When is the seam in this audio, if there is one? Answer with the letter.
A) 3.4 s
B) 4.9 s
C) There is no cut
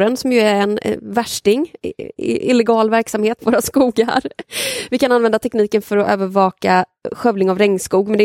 A